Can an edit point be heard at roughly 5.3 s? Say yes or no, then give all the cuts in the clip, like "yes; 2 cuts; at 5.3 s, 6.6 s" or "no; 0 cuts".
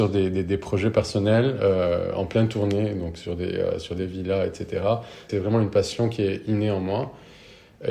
yes; 1 cut; at 5.3 s